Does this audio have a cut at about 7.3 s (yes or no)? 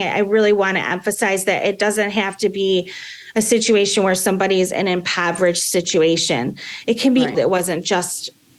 yes